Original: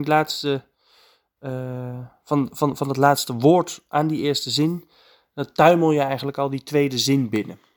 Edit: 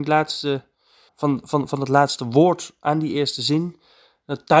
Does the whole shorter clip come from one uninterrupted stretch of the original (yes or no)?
no